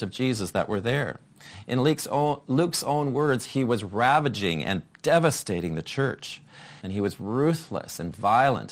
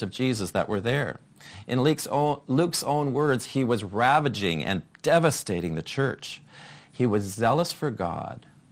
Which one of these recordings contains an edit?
first; 1 cut; at 6.8 s

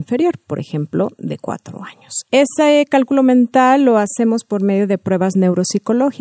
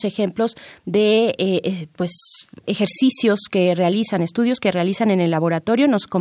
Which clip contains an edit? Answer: first; 1 cut; at 2.2 s

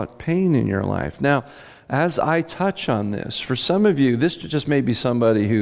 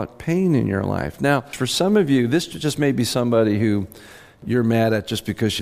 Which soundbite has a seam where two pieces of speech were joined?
second; 1 cut; at 1.5 s

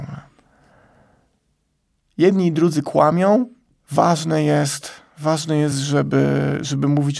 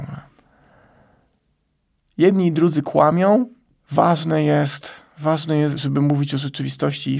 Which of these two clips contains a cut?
second; 1 cut; at 5.7 s

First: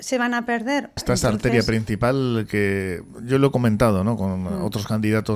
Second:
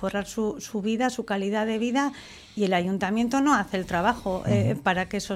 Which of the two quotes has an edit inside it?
first; 1 cut; at 1.0 s

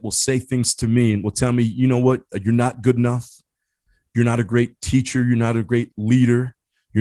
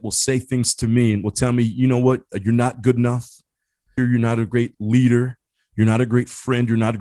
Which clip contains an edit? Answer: second; 1 cut; at 4.0 s

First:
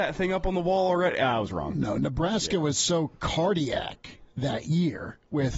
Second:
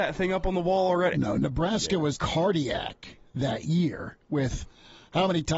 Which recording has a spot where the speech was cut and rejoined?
second; 2 cuts; at 1.1 s, 2.1 s

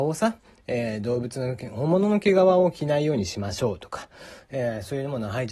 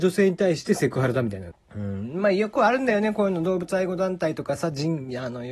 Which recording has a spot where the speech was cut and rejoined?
second; 1 cut; at 1.5 s

